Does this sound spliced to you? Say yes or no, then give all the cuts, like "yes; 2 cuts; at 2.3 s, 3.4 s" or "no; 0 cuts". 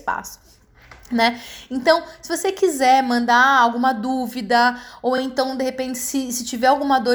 no; 0 cuts